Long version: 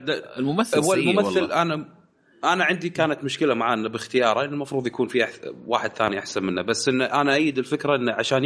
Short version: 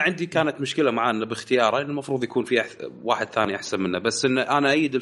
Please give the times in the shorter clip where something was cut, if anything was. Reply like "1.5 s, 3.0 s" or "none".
none